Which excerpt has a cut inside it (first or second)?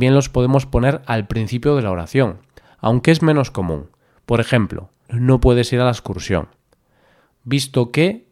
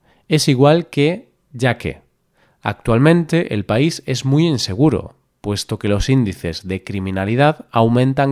first